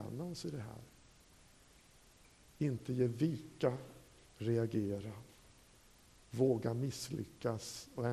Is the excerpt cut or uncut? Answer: cut